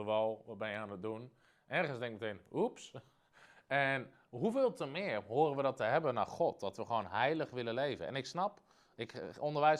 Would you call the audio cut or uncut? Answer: uncut